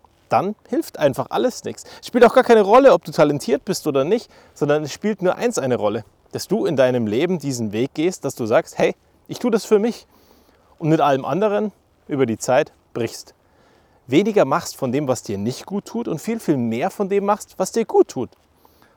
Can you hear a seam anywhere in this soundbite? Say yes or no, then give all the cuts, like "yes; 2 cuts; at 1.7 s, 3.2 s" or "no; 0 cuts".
yes; 1 cut; at 9.1 s